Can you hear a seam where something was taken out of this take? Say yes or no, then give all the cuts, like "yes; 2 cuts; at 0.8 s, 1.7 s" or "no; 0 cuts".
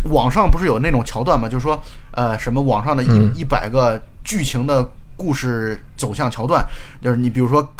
no; 0 cuts